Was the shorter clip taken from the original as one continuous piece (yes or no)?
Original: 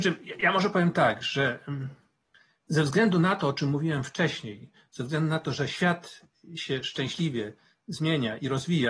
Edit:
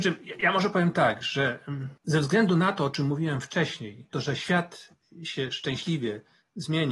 no